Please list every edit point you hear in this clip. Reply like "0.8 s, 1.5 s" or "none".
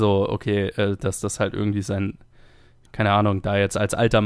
2.9 s